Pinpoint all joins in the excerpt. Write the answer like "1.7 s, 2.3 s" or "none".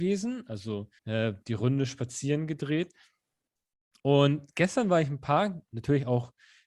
1.0 s, 4.0 s